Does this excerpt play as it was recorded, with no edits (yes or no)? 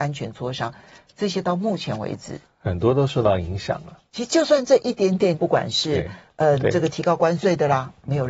no